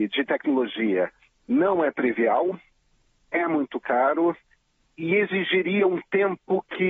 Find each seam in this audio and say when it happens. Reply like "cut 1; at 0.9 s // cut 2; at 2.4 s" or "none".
cut 1; at 4.9 s